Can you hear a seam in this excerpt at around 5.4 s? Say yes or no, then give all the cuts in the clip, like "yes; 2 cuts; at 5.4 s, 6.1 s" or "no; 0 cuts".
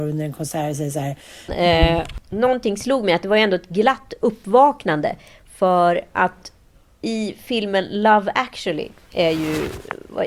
no; 1 cut; at 1.5 s